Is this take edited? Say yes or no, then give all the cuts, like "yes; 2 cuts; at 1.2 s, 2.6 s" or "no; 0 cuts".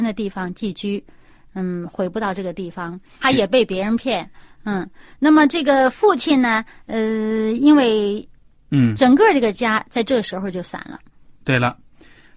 yes; 2 cuts; at 3.2 s, 8.5 s